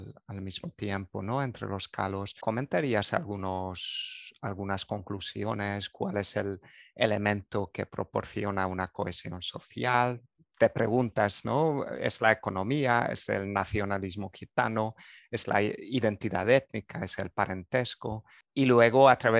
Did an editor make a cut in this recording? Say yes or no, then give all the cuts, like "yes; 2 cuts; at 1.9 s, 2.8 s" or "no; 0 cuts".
no; 0 cuts